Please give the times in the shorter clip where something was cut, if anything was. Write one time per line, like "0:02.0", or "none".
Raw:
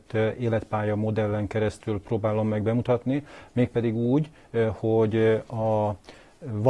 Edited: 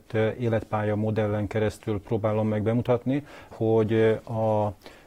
0:03.5